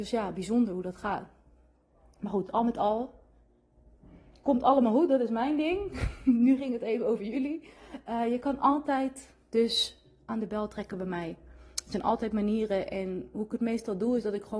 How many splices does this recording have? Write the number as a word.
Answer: zero